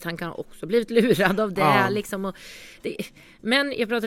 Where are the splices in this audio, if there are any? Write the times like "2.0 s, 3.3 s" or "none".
none